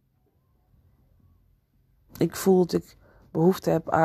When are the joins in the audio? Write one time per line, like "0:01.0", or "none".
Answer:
none